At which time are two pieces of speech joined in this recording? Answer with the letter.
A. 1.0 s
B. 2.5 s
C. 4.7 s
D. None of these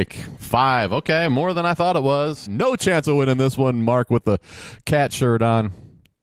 B